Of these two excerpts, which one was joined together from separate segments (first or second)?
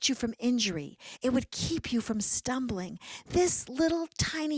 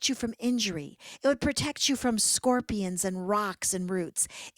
first